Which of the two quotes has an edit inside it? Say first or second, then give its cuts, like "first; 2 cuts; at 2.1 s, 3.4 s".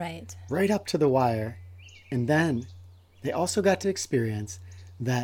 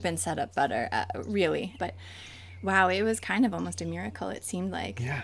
second; 1 cut; at 1.8 s